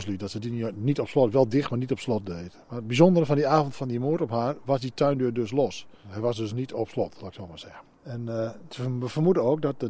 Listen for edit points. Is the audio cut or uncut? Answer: cut